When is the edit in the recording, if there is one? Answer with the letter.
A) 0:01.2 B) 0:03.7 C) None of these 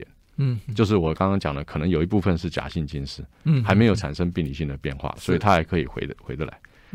C